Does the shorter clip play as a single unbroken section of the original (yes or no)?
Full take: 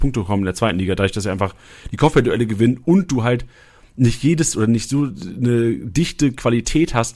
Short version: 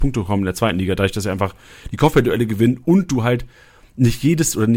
yes